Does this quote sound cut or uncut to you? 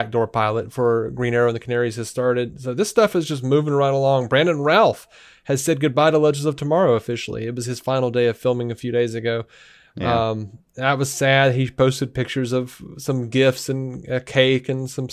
uncut